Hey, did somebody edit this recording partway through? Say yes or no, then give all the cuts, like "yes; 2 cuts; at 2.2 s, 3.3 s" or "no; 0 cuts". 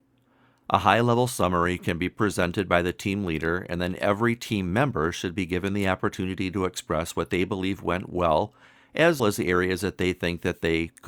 yes; 1 cut; at 9.2 s